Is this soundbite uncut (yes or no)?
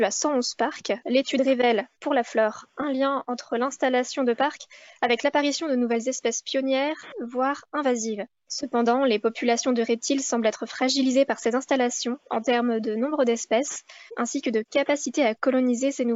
no